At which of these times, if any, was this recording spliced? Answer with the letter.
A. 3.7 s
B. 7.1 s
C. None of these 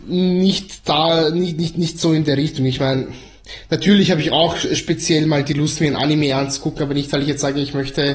C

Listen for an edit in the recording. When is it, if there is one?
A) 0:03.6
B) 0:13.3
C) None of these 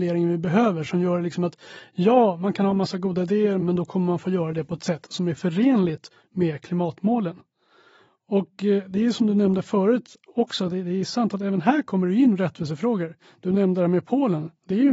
A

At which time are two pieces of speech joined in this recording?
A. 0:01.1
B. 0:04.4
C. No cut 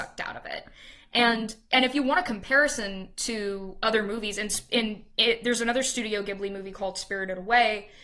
C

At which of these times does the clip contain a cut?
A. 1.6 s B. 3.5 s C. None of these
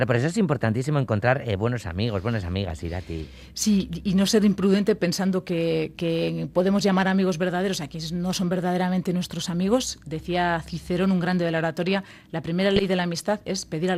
C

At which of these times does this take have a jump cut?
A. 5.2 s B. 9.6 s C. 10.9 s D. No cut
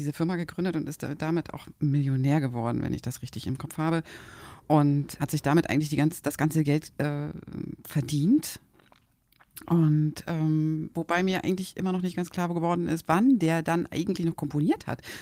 A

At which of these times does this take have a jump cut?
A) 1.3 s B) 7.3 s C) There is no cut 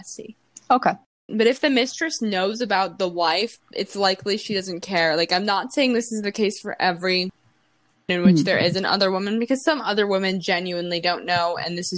A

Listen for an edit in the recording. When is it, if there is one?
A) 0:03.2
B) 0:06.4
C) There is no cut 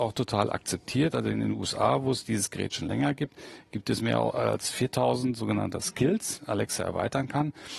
B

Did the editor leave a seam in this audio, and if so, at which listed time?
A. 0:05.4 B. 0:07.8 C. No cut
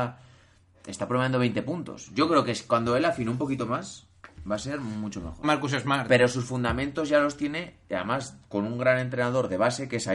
A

